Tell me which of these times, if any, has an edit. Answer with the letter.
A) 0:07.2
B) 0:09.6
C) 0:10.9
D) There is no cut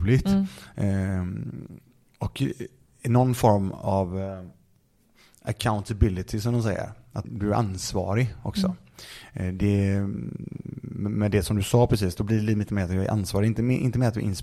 A